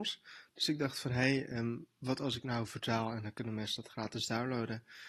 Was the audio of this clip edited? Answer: no; 0 cuts

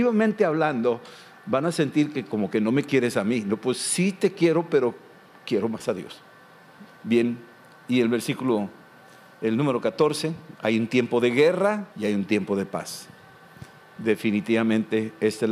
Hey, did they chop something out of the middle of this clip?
yes; 3 cuts; at 6.9 s, 10.6 s, 11.9 s

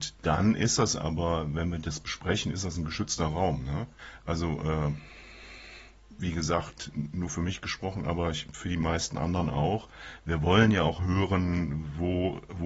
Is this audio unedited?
yes; 0 cuts

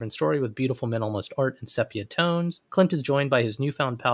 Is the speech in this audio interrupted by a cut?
no; 0 cuts

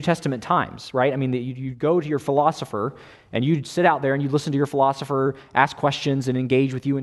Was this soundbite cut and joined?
no; 0 cuts

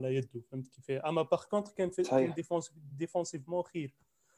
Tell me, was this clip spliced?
no; 0 cuts

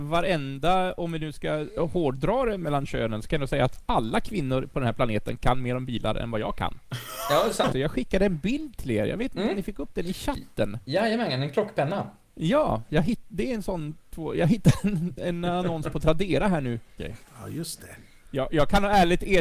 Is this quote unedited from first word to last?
no; 2 cuts; at 7.7 s, 17.0 s

